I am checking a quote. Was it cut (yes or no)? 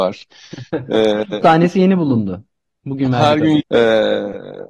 yes